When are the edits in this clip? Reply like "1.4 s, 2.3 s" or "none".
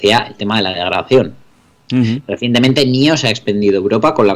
none